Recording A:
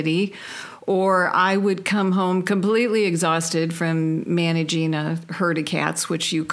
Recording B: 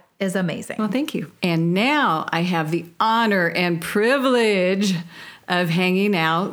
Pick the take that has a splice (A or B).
B